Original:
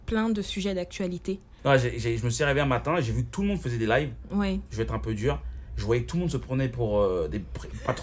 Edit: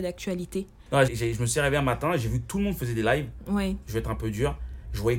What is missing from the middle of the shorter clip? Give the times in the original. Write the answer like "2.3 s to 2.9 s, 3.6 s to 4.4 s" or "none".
1.8 s to 1.9 s